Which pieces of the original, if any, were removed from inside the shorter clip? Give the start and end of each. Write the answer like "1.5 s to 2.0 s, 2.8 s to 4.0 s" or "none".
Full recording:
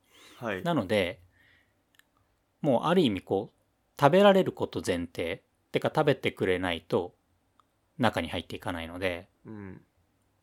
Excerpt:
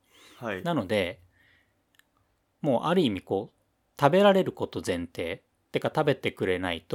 none